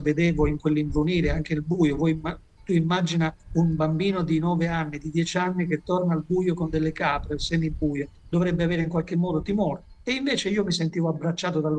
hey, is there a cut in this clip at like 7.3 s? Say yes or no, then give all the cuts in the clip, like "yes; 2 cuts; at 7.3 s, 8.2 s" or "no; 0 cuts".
no; 0 cuts